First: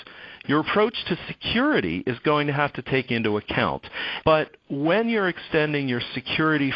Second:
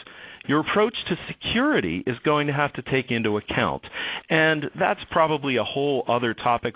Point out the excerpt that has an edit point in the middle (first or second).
first